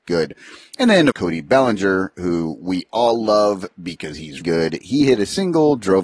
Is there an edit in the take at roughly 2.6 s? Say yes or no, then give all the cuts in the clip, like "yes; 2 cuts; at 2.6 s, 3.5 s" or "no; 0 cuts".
no; 2 cuts; at 1.1 s, 4.4 s